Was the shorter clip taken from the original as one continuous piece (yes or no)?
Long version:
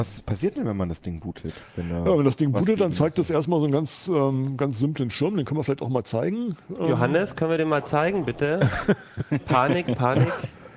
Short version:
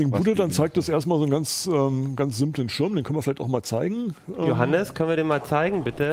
yes